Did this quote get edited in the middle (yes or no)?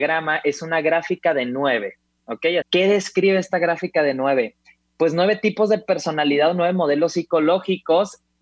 yes